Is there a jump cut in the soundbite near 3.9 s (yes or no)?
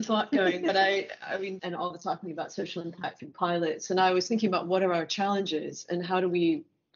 no